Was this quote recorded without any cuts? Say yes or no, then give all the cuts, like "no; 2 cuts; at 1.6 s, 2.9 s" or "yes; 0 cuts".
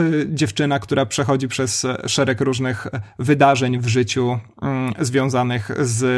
yes; 0 cuts